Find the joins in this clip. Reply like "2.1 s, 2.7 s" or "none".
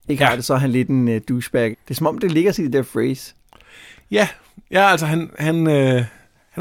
1.7 s